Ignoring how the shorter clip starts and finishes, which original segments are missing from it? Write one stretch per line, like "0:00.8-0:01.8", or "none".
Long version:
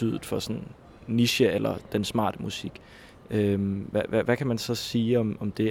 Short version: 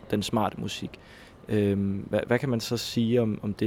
0:04.1-0:04.2